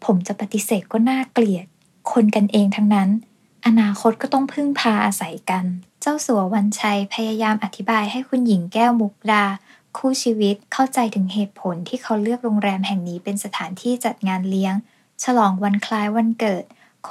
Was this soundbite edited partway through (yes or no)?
yes